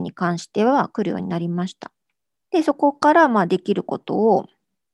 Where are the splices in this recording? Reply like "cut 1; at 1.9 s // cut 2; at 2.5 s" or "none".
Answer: cut 1; at 2.4 s